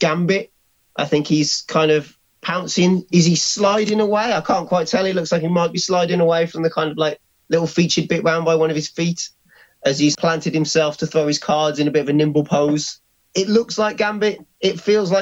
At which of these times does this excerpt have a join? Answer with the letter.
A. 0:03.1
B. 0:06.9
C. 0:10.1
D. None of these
C